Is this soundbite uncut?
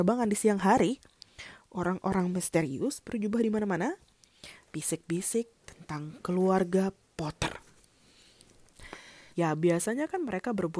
no; 2 cuts; at 4.6 s, 9.3 s

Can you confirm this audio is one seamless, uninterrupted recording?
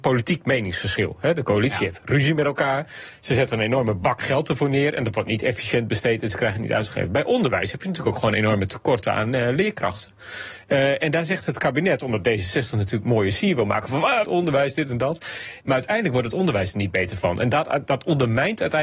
no; 2 cuts; at 14.2 s, 15.6 s

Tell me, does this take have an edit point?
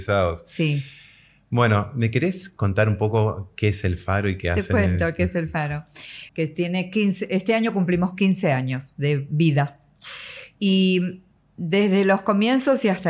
yes; 1 cut; at 6.3 s

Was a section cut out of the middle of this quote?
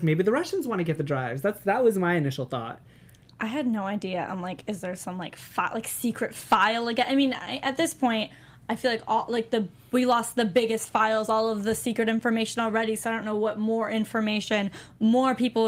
no; 0 cuts

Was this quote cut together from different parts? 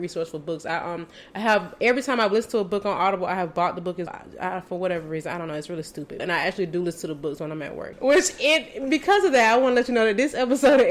yes; 3 cuts; at 4.1 s, 6.2 s, 7.9 s

